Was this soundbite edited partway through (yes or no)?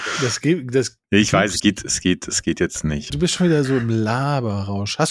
yes